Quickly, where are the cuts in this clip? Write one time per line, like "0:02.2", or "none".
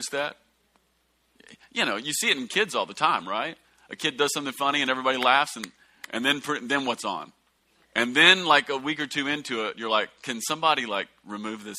0:07.8